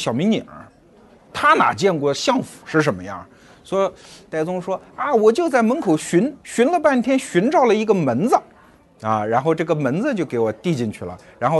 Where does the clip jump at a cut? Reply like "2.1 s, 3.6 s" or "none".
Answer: none